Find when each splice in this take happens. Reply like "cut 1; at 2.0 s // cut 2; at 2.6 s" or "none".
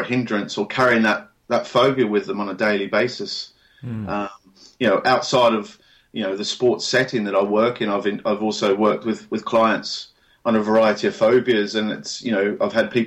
none